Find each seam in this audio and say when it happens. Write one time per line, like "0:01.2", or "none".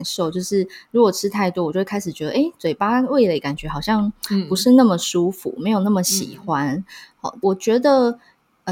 0:07.4